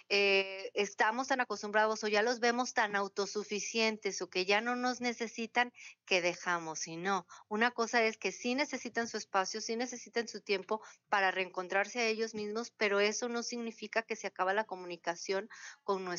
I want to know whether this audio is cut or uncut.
uncut